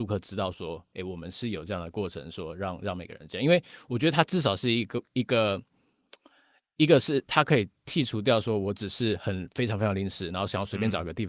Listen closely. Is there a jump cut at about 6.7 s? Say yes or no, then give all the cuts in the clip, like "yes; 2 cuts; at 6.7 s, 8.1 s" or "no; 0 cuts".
no; 0 cuts